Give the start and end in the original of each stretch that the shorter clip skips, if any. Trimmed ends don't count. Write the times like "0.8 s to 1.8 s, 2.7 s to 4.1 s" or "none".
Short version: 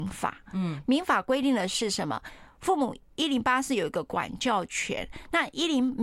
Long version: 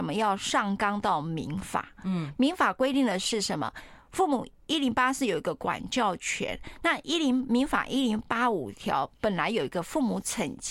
none